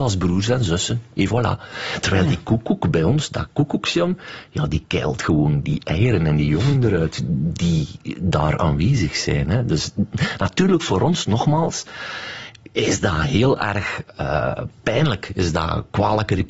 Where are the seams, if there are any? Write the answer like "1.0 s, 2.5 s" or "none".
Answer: none